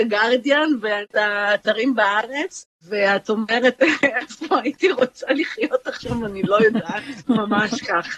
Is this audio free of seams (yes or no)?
no